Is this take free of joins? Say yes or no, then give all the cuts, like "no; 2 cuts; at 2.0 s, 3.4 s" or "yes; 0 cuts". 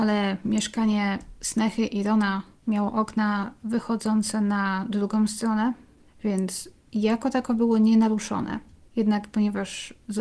no; 1 cut; at 6.1 s